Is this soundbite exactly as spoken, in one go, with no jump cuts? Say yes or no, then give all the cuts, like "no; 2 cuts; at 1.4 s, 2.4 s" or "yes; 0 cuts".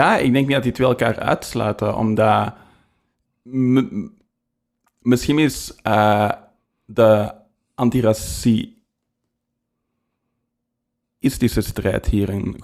yes; 0 cuts